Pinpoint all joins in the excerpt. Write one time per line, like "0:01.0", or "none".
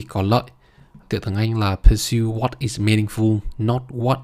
0:01.0